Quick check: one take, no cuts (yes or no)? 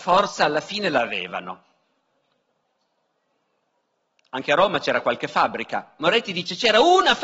yes